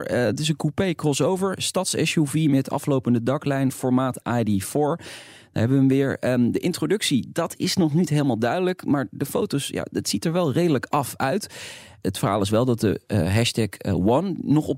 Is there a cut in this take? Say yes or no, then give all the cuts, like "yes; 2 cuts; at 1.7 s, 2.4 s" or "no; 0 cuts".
no; 0 cuts